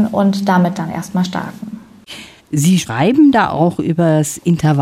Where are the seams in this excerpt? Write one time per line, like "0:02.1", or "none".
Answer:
none